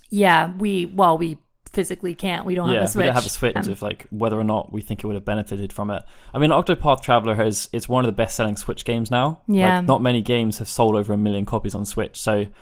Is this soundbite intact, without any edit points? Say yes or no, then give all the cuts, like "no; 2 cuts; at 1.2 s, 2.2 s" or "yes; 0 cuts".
no; 1 cut; at 3.6 s